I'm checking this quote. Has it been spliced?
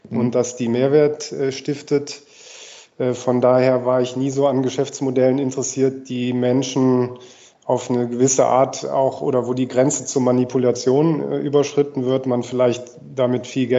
no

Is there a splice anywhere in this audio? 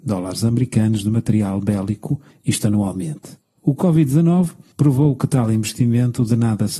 no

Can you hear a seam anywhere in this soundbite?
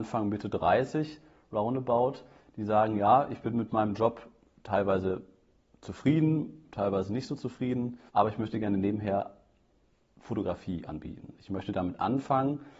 yes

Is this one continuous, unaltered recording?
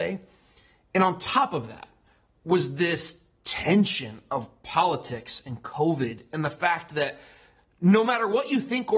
yes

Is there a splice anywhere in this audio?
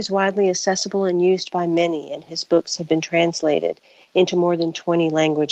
no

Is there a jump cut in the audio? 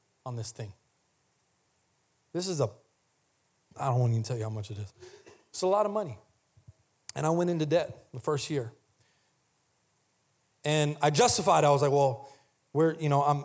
no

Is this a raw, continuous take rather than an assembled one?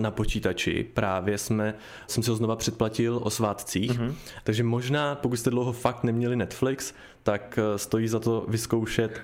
no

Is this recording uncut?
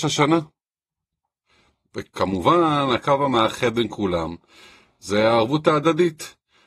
yes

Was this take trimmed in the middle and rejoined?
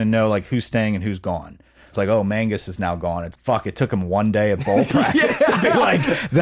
yes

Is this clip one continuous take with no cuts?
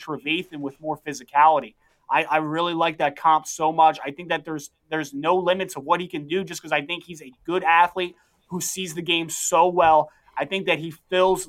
yes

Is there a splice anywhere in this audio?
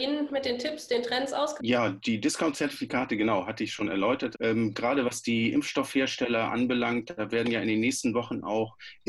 yes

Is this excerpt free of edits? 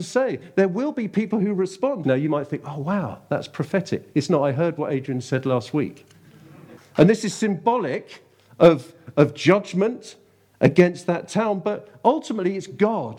no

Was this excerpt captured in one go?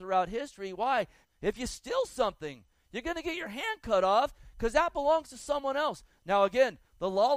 no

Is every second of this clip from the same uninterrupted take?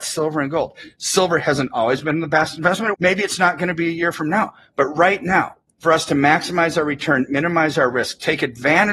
no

